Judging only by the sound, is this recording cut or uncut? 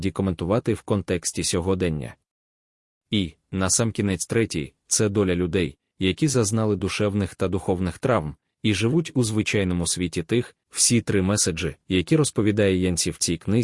cut